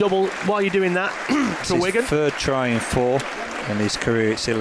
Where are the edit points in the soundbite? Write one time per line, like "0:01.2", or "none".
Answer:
0:01.6
0:03.2